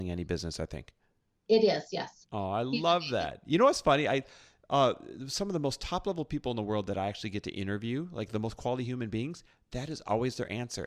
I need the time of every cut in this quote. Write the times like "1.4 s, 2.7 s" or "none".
2.2 s